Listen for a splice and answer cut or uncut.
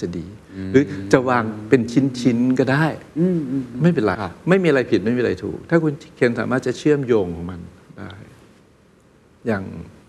cut